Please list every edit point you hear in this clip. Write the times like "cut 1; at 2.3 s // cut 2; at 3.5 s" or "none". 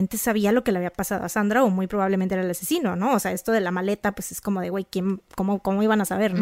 none